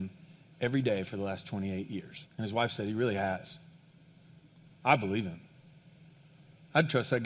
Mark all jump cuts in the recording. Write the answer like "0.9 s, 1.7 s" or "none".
2.3 s